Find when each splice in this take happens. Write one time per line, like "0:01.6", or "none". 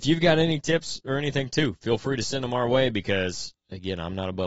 none